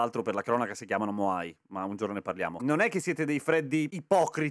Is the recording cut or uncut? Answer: cut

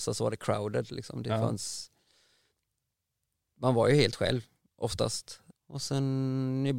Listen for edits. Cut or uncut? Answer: cut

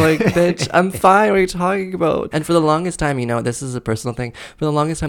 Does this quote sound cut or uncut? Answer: cut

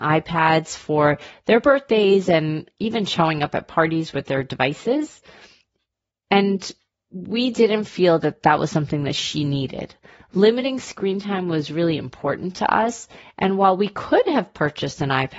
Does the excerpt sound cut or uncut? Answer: uncut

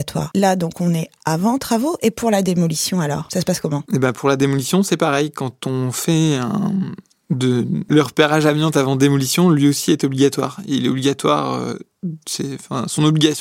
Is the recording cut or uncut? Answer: uncut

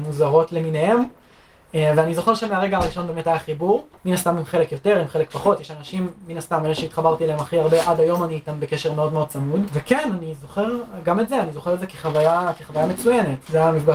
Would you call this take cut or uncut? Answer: cut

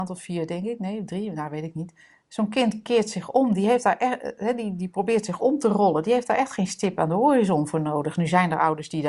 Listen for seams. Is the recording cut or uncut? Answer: uncut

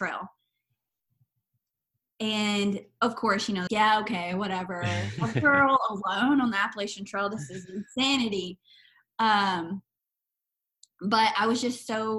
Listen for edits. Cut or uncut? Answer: cut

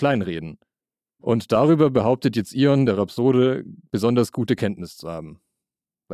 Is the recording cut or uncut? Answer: cut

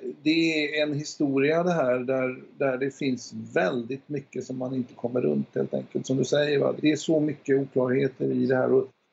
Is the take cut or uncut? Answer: cut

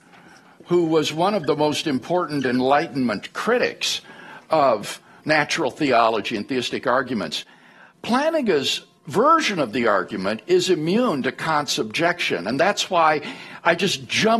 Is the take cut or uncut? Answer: uncut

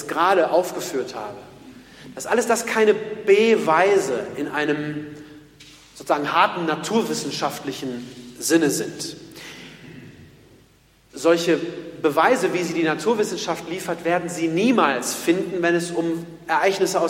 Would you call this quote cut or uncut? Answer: uncut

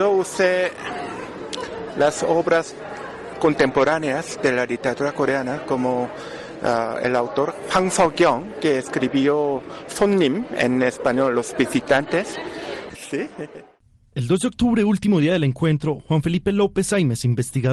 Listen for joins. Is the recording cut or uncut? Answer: cut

